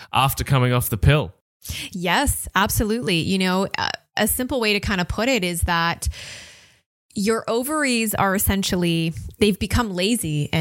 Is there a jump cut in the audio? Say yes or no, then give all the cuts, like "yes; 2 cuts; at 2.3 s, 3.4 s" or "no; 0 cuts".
no; 0 cuts